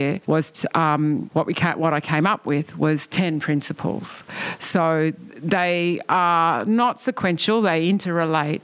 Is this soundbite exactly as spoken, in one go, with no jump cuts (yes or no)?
yes